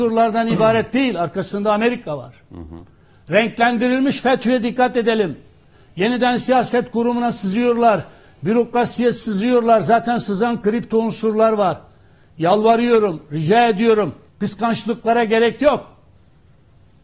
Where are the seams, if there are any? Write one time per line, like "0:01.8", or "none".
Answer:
0:14.3